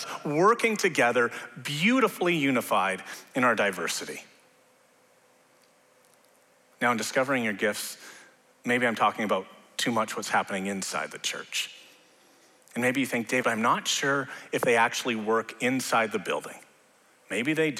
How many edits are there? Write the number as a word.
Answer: one